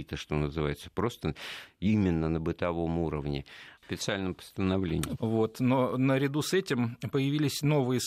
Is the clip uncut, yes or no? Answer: no